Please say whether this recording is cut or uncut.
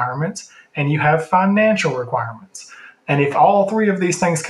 uncut